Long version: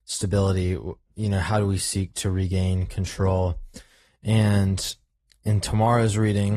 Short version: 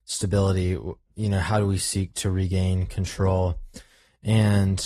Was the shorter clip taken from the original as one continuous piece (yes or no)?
yes